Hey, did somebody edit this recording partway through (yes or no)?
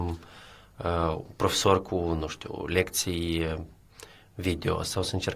no